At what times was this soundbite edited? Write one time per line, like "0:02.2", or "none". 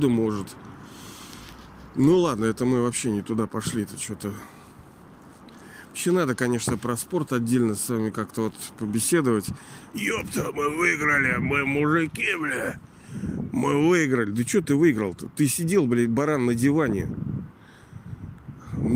0:09.9